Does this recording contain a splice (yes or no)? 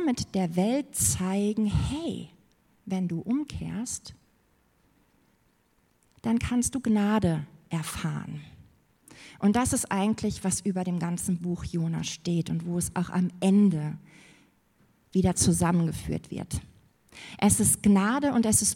no